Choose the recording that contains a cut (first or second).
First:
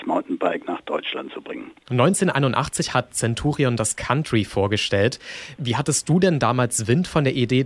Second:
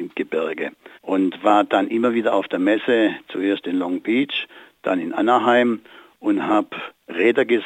second